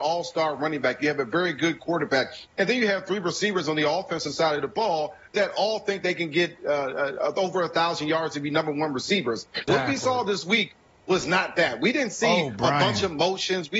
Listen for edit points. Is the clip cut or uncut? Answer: cut